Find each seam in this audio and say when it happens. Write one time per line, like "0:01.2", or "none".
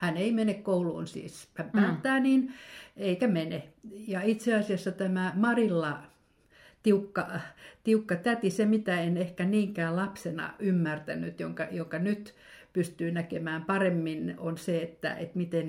none